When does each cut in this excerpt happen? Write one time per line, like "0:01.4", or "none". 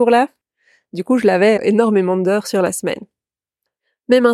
0:01.6